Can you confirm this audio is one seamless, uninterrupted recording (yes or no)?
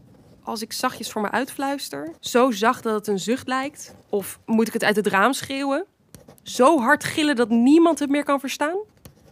no